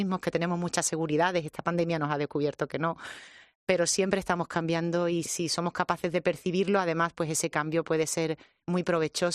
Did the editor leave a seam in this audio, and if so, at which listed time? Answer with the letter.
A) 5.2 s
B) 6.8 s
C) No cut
A